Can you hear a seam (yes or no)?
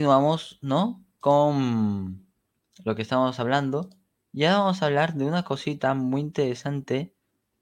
no